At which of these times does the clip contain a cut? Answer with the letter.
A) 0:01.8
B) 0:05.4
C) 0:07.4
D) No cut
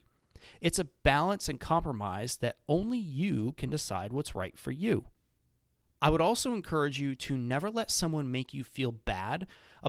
D